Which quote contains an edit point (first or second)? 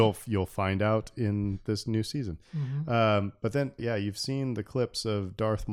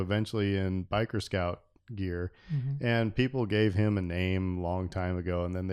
first